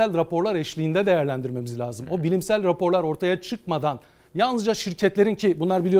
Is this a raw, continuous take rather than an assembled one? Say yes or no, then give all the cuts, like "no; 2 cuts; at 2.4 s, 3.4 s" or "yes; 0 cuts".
yes; 0 cuts